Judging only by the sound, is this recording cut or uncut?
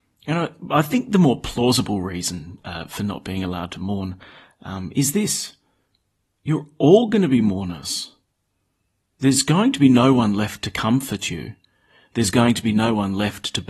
uncut